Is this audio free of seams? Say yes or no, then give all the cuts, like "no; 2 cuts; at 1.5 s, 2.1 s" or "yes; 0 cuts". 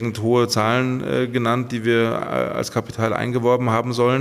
yes; 0 cuts